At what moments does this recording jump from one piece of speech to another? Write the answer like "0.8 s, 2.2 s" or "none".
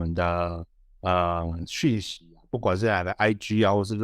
none